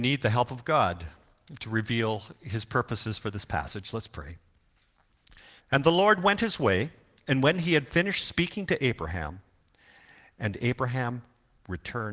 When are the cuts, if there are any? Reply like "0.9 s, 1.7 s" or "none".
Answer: 5.6 s

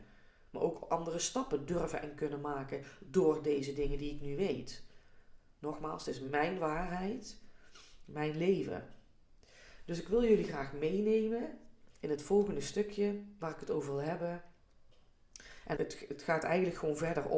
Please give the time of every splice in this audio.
15.8 s

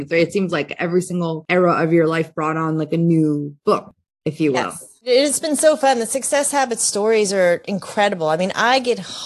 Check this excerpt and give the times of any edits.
none

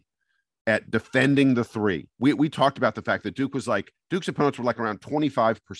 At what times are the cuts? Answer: 2.1 s

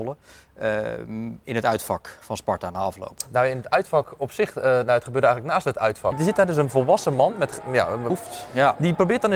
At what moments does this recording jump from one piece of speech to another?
6.1 s, 8.1 s

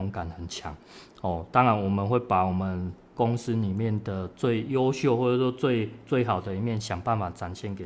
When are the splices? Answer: none

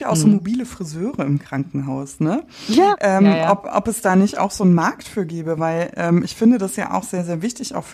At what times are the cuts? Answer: none

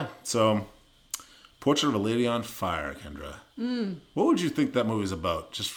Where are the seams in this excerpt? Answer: none

